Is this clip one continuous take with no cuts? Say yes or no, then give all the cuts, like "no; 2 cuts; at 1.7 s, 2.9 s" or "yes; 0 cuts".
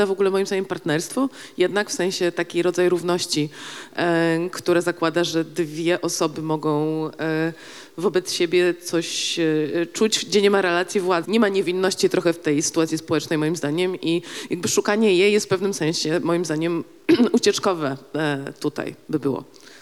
no; 1 cut; at 11.2 s